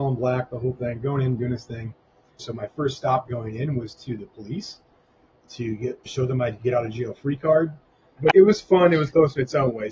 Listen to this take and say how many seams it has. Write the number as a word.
two